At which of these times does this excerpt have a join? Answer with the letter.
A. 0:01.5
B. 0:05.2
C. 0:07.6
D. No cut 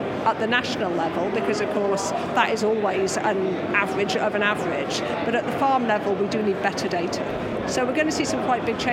C